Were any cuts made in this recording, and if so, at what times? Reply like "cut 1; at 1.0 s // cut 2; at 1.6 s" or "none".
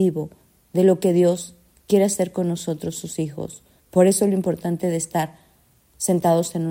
cut 1; at 3.8 s